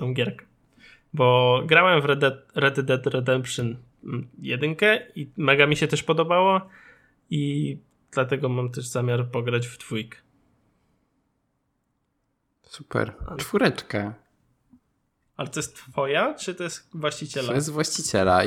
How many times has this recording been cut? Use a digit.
1